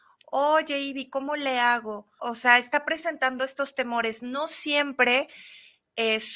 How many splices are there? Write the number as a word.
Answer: one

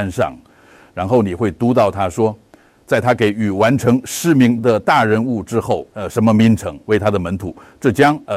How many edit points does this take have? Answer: one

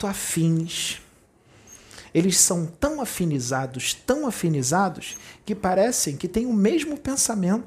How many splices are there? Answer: zero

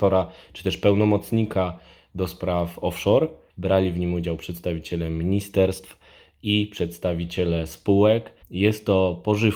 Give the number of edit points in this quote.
two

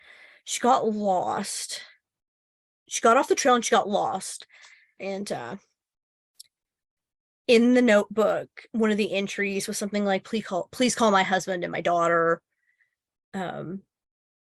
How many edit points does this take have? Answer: two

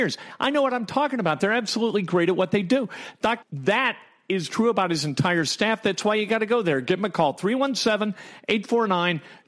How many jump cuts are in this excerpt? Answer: one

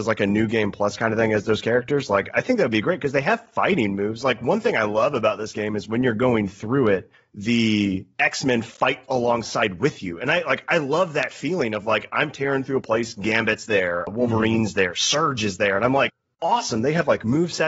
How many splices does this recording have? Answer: zero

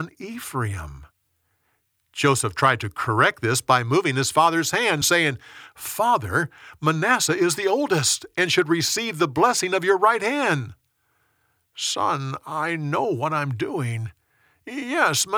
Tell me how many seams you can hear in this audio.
zero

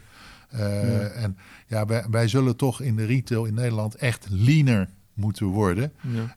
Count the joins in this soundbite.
one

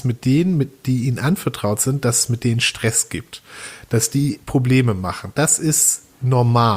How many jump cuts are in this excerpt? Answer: zero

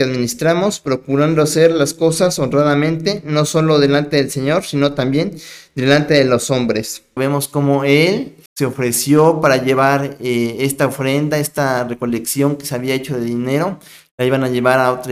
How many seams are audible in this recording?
two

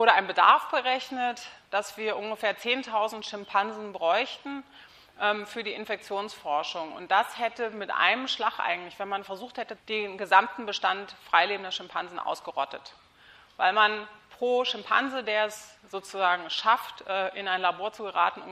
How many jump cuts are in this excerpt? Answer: one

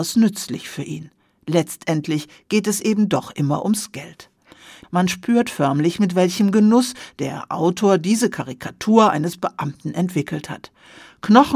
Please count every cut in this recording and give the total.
one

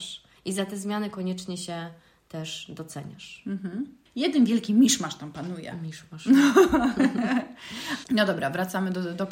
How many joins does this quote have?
one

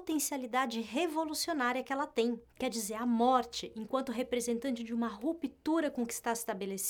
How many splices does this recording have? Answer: zero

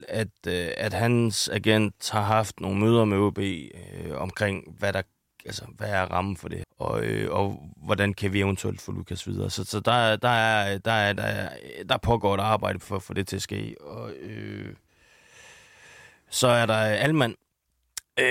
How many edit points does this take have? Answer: one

